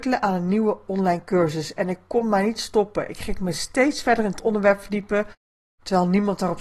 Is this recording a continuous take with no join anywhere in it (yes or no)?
yes